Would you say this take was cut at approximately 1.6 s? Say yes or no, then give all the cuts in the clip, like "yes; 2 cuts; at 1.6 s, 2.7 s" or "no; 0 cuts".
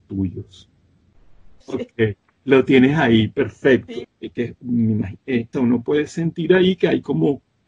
yes; 3 cuts; at 1.6 s, 4.0 s, 5.5 s